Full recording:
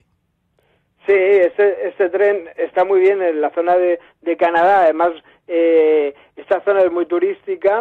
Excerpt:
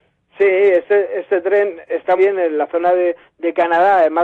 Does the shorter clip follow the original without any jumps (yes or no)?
no